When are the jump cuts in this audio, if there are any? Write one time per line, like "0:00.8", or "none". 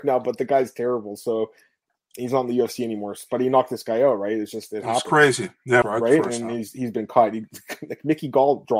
0:05.8

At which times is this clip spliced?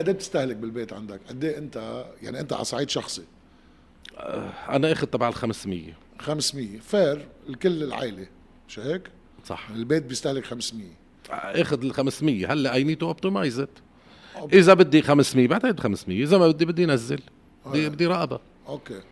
none

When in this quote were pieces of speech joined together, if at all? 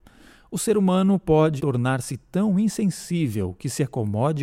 0:01.6

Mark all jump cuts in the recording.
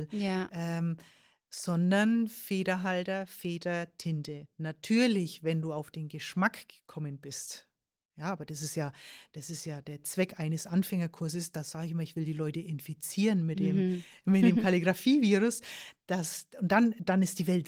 none

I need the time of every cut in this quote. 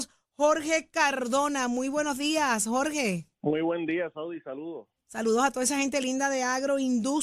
0:03.3

